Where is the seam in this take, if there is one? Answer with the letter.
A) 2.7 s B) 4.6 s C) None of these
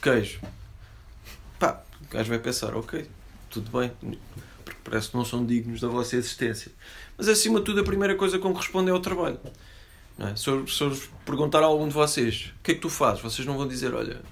B